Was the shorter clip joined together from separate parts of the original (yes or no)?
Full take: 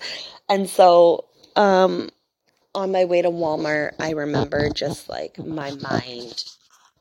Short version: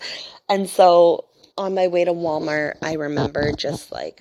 yes